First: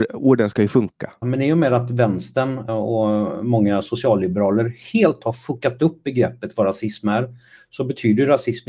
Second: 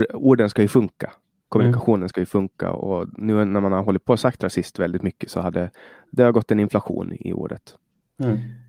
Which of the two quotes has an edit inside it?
first; 2 cuts; at 1.2 s, 2.7 s

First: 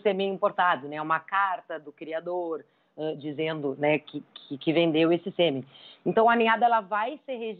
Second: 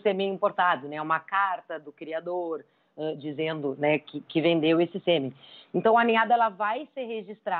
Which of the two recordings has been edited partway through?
second; 1 cut; at 4.3 s

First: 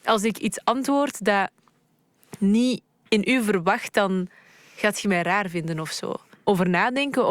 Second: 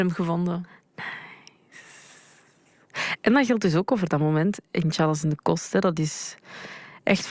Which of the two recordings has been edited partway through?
first; 2 cuts; at 3.9 s, 6.4 s

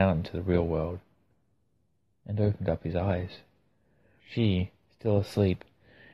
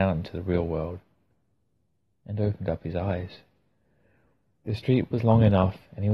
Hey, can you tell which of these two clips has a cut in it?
first; 1 cut; at 4.2 s

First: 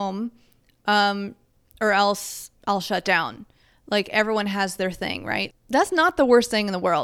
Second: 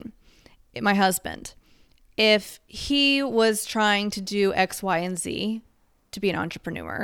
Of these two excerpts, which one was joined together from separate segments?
first; 2 cuts; at 2.6 s, 5.5 s

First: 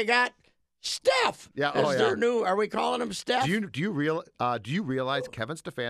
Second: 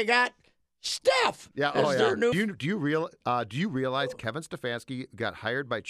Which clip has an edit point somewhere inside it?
second; 1 cut; at 2.3 s

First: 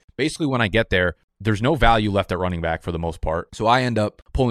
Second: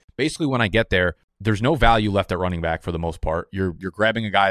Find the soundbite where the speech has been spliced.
first; 1 cut; at 3.5 s

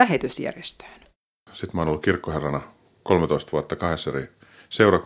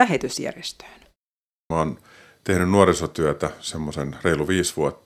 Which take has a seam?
first; 1 cut; at 1.5 s

